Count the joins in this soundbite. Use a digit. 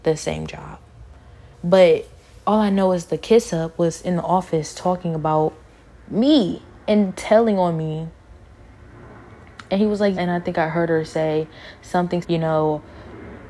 3